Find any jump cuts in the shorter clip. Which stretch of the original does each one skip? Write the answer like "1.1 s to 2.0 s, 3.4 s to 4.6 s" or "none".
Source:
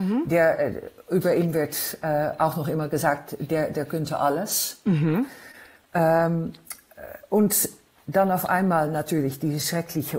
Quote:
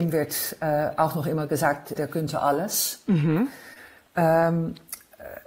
3.4 s to 3.7 s

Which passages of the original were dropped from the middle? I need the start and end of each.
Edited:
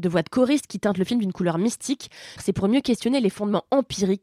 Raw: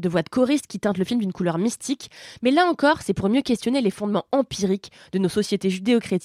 2.4 s to 3.0 s

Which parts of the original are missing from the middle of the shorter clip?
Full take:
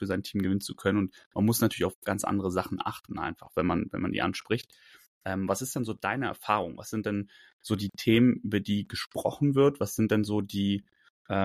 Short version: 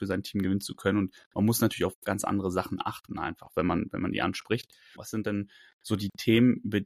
5.0 s to 6.8 s

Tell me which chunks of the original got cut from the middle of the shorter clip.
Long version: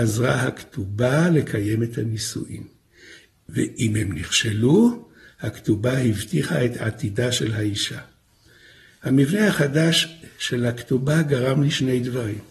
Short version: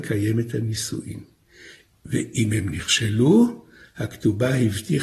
none

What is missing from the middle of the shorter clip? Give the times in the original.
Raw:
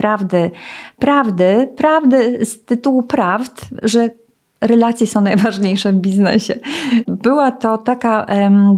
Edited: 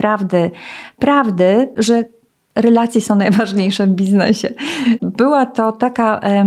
1.7 s to 3.8 s

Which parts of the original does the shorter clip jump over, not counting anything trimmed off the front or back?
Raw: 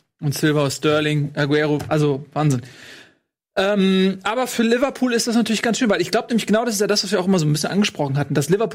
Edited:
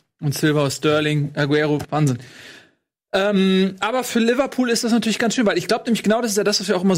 1.8 s to 2.3 s

